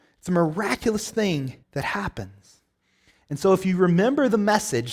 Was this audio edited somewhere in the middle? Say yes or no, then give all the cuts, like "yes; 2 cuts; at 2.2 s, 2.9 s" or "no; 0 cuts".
yes; 1 cut; at 1.6 s